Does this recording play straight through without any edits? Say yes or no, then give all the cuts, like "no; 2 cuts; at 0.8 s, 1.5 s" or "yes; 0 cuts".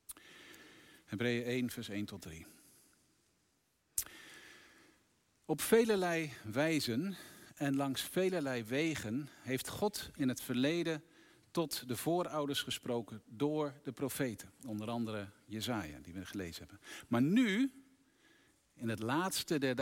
yes; 0 cuts